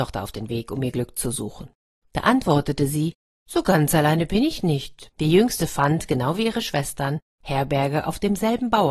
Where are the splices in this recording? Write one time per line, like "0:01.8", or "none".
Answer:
0:02.0
0:05.1